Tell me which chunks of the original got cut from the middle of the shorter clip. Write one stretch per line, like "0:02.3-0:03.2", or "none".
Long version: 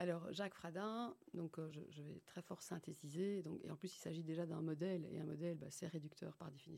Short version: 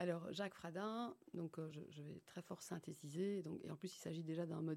none

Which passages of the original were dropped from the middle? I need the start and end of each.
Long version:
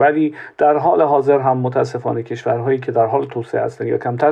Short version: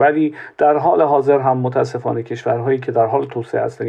none

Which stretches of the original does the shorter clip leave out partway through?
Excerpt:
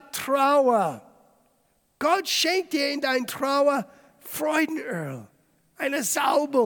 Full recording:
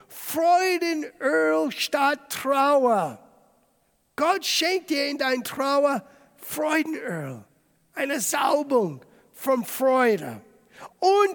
none

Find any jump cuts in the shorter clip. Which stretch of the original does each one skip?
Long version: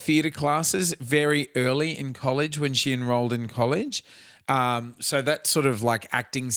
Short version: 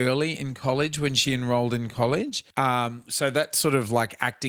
0:04.1-0:04.4

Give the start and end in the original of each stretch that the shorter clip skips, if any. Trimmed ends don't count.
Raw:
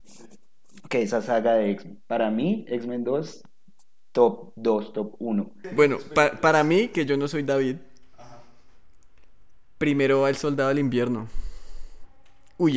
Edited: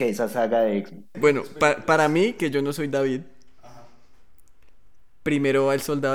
0:02.1-0:05.7

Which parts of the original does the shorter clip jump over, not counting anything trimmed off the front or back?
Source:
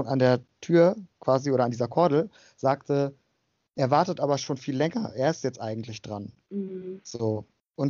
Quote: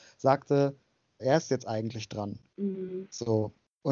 0:03.6-0:05.1

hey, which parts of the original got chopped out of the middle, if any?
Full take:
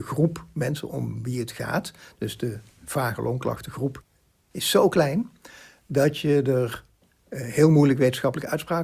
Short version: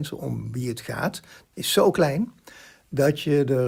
0:02.1-0:04.4

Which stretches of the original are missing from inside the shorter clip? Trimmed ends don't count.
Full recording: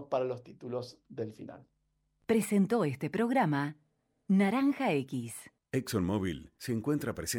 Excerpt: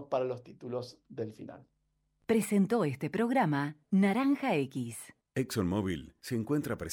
0:03.8-0:04.2

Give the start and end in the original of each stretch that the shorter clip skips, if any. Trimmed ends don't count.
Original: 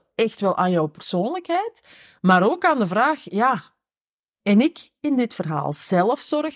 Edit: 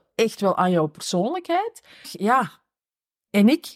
0:02.0-0:03.2

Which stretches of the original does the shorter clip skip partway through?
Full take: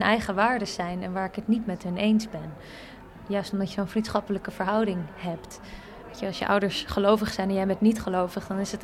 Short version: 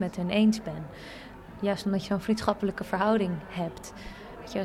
none

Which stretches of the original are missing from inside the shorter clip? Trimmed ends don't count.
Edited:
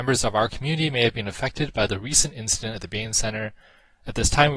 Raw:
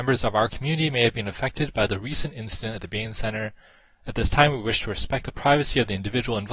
none

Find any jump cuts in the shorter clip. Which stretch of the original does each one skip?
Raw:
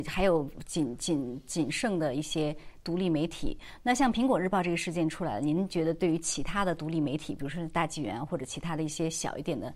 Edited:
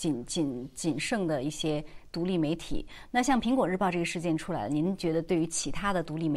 none

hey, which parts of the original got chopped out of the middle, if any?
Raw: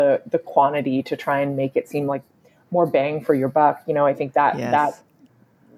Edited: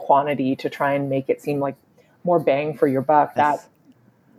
0:03.8-0:04.7

